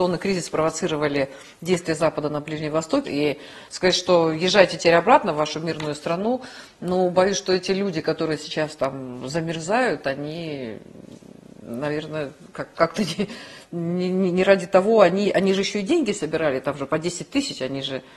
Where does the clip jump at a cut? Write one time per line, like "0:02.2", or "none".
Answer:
0:03.0